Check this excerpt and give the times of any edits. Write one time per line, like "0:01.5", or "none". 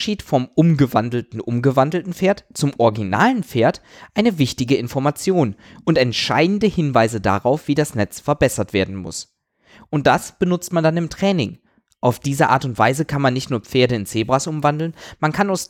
none